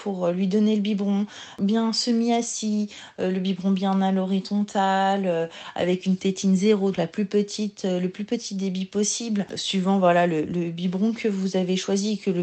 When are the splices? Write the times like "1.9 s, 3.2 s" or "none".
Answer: 6.9 s